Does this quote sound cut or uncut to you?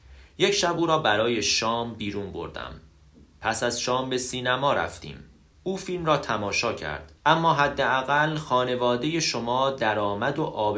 cut